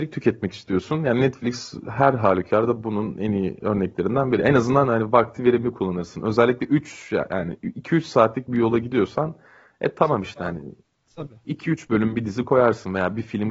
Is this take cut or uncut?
uncut